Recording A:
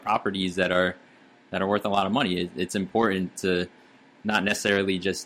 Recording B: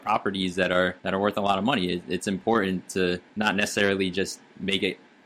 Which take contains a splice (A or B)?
B